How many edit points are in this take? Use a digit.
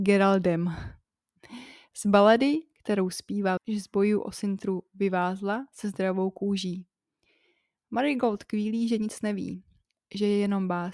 1